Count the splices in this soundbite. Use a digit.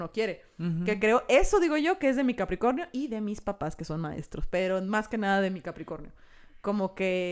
0